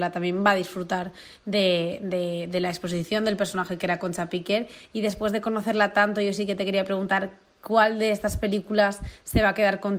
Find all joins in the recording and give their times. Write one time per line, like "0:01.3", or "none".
none